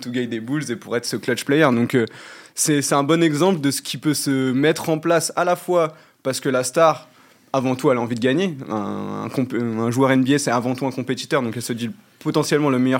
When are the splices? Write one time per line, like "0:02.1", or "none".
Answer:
none